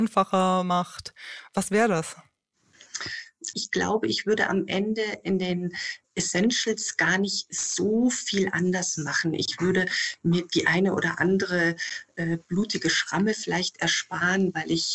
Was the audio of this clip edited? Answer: yes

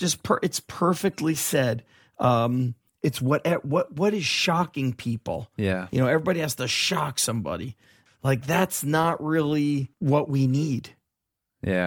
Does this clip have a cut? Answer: yes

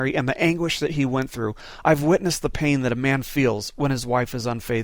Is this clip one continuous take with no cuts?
yes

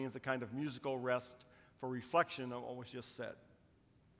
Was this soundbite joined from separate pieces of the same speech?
no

